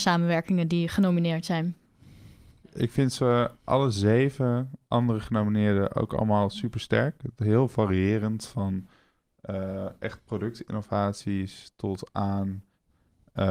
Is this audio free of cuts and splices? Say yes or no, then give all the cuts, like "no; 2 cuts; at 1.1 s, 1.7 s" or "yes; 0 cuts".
yes; 0 cuts